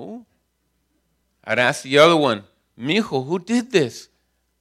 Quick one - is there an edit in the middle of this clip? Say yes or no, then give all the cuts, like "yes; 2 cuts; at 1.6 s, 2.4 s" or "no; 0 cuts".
no; 0 cuts